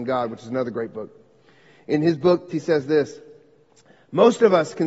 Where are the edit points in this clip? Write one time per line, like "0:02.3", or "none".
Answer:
0:02.5